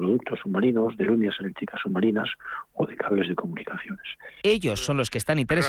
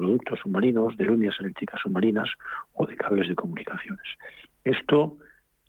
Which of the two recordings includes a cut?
first; 1 cut; at 4.4 s

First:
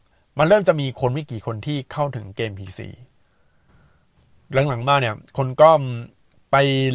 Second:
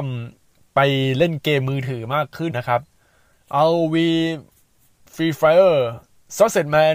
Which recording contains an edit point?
second; 1 cut; at 2.5 s

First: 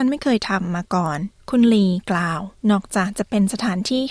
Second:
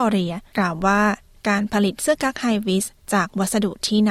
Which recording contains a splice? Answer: first; 2 cuts; at 1.4 s, 2.6 s

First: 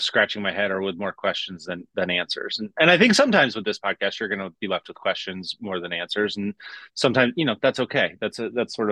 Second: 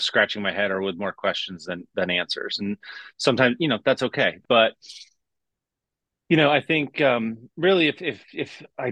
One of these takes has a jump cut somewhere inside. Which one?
second; 2 cuts; at 2.6 s, 4.4 s

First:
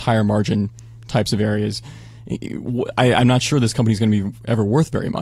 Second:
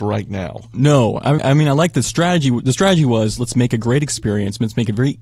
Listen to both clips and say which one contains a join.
second; 1 cut; at 1.4 s

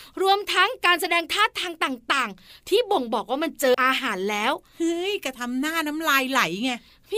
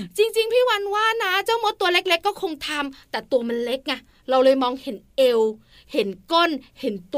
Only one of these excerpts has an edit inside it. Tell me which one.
first; 1 cut; at 3.7 s

